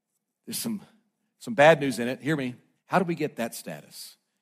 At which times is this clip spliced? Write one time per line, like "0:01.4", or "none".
0:02.8